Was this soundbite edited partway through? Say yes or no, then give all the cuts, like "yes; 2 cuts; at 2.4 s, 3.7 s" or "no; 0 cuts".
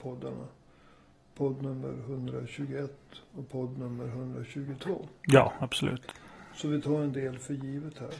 no; 0 cuts